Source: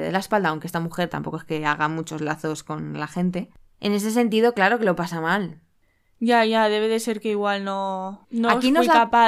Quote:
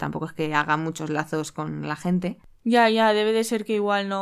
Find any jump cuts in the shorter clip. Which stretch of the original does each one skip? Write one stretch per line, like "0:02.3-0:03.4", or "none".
0:03.7-0:06.1